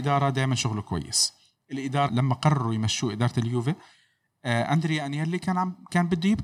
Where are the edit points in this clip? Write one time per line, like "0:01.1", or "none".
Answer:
0:02.1